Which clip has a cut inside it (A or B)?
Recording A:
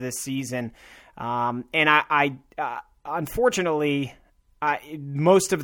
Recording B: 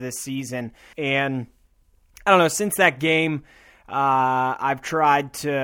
B